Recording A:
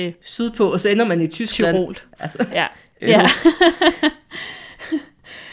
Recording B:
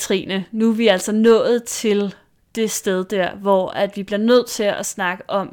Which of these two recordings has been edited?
A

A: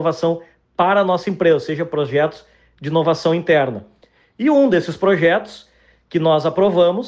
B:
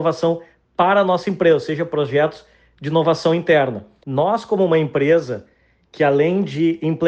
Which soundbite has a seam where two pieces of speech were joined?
B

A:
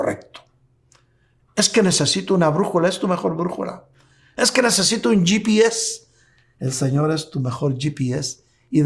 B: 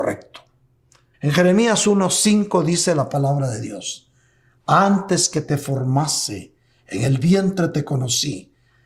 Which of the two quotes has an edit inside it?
B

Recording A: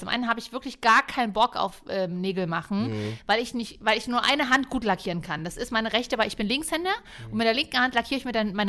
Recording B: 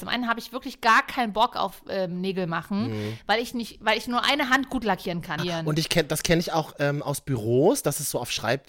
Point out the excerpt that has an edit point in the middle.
B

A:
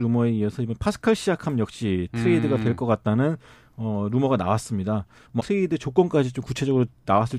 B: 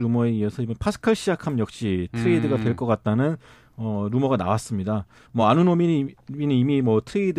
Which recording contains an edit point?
A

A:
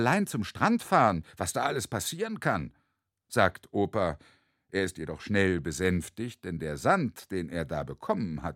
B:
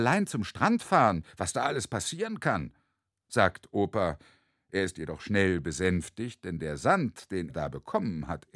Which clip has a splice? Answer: B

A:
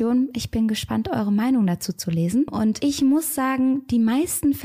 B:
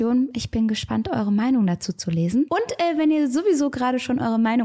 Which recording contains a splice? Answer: A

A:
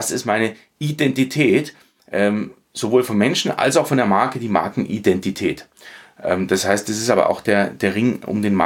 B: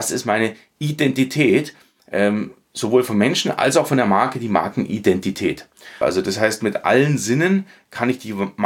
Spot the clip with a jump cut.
B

